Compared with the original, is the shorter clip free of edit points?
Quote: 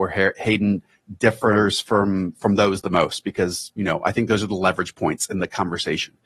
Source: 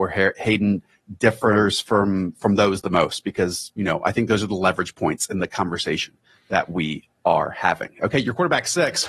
yes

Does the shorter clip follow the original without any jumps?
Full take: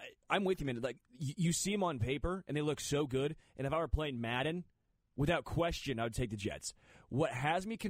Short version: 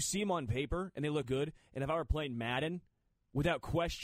no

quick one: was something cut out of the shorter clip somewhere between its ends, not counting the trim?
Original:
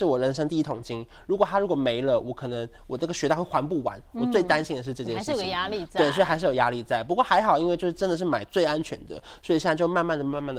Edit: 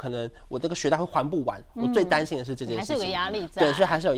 no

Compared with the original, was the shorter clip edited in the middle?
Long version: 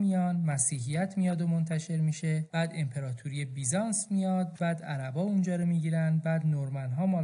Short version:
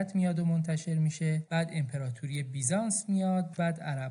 no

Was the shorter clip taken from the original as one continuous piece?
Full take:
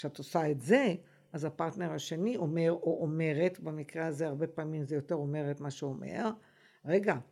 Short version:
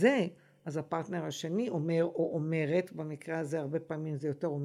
yes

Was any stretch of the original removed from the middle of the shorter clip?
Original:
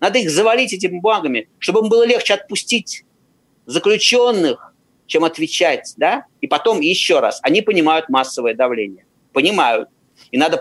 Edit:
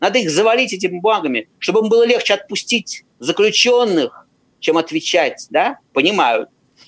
yes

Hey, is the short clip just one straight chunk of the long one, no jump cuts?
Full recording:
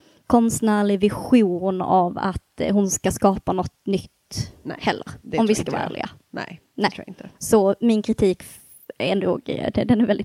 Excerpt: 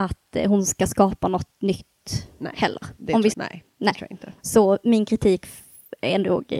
no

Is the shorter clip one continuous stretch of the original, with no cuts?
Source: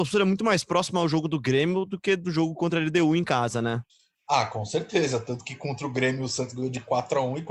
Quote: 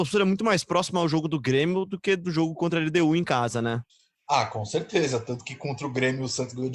yes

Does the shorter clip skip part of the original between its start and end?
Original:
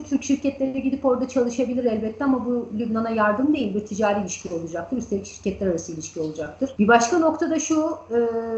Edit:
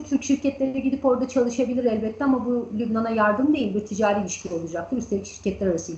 no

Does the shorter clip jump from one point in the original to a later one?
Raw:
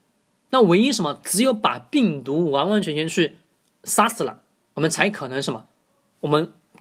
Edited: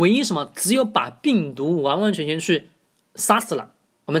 no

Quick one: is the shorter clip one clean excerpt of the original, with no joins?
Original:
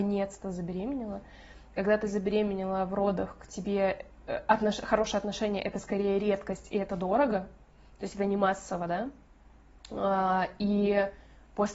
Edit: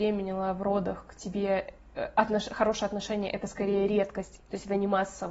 no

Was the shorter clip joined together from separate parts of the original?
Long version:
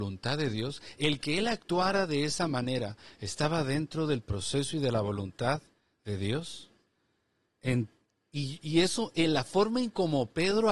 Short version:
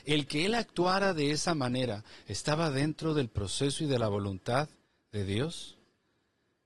no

